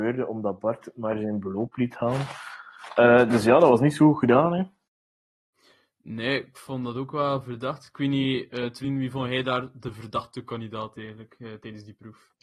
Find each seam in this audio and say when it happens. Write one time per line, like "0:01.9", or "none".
none